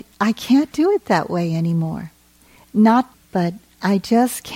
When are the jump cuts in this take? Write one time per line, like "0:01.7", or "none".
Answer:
0:03.1